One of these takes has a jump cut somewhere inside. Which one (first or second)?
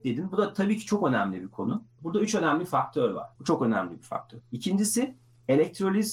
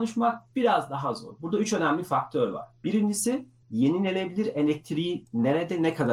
first